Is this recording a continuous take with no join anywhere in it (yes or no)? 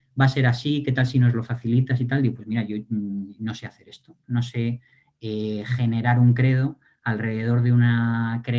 yes